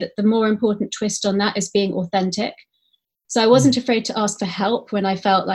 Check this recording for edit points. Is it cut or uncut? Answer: uncut